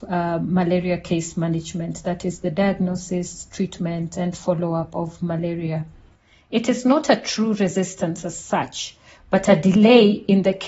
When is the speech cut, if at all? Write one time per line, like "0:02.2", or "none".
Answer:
none